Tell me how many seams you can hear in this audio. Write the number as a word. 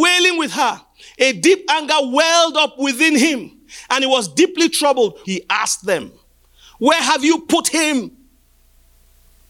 one